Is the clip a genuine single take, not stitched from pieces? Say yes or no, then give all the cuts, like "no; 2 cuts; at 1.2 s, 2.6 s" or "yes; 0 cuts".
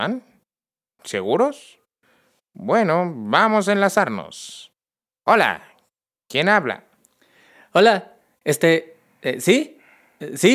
yes; 0 cuts